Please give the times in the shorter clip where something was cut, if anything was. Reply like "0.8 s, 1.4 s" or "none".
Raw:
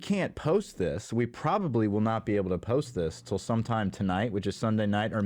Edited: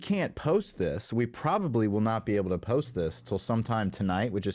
none